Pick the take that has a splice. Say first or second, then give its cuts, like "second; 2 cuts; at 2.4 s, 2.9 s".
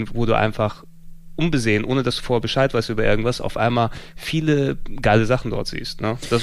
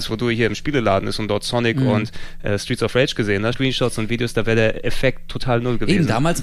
second; 1 cut; at 3.5 s